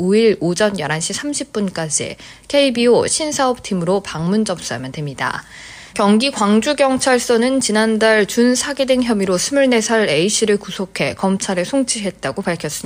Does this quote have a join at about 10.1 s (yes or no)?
no